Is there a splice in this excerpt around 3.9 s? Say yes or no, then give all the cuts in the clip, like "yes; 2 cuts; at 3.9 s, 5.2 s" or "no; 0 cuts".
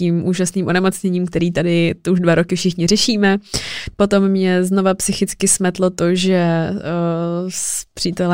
yes; 1 cut; at 3.9 s